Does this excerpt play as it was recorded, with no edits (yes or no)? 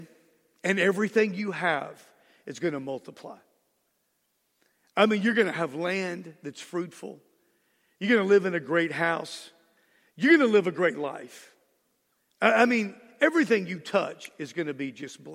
yes